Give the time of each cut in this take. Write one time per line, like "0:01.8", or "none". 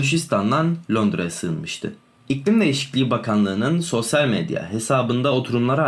0:02.2